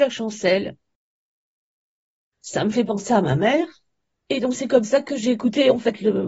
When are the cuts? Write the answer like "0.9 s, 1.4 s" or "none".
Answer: 4.2 s